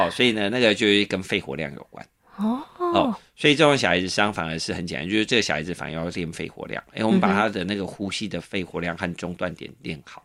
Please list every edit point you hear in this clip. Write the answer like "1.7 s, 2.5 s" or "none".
none

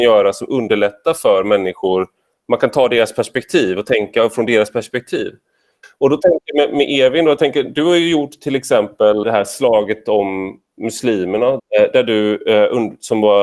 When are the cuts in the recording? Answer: 5.8 s, 9.2 s, 11.6 s

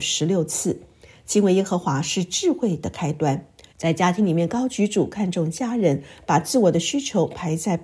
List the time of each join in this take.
3.7 s

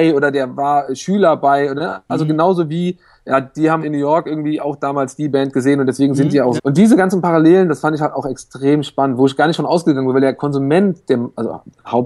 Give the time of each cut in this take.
3.8 s, 6.6 s

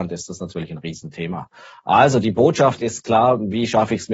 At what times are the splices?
none

